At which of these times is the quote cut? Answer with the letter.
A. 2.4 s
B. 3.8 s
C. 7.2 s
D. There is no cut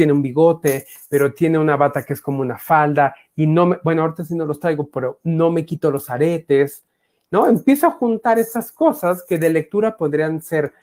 D